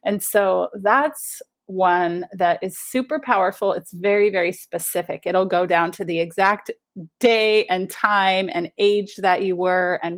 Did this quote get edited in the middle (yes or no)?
no